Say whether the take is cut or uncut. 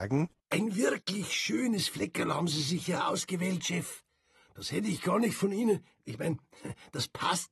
uncut